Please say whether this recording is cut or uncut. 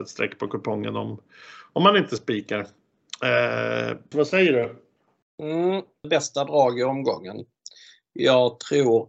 cut